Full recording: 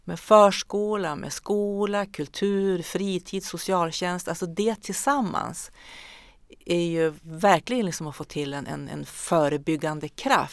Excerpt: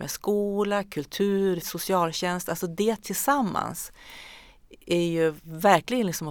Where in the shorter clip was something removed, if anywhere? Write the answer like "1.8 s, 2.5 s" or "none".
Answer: 1.6 s